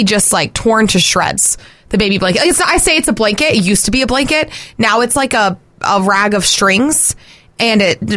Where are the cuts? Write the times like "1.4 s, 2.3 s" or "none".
none